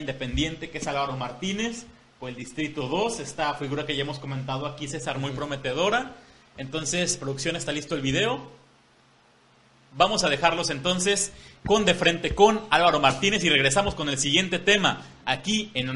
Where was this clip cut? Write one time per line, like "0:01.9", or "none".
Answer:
none